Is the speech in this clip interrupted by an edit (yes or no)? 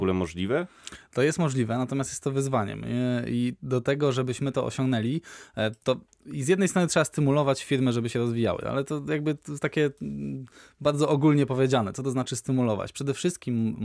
no